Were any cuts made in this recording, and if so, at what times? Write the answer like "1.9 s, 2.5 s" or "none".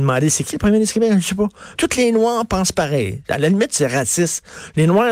1.8 s